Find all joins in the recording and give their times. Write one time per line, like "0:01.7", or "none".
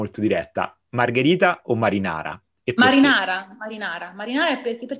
none